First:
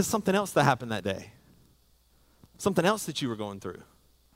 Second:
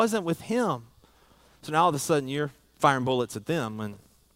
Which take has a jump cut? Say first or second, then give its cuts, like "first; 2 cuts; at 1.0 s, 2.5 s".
second; 1 cut; at 1.5 s